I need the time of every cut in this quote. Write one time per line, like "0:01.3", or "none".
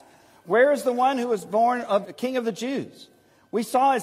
0:02.0